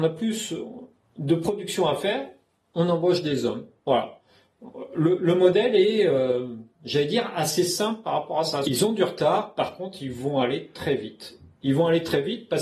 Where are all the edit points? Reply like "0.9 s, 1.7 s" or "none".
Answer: 8.6 s